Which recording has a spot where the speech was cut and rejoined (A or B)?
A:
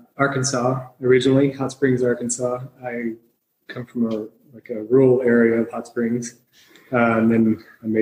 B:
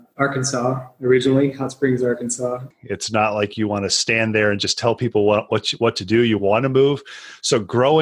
B